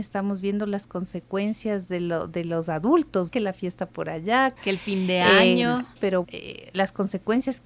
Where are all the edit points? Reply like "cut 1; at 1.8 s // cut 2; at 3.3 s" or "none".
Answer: cut 1; at 6.2 s